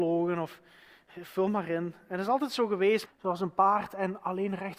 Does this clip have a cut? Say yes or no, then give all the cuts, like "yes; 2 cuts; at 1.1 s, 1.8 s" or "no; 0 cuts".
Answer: yes; 1 cut; at 3.1 s